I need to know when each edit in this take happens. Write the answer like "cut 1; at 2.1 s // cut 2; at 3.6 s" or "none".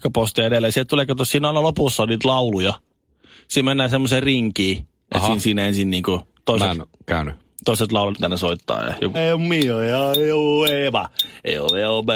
cut 1; at 8.1 s // cut 2; at 9.1 s